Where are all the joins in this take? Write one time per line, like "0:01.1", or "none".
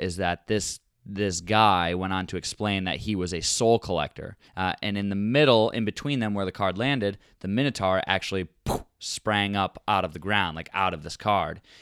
0:04.5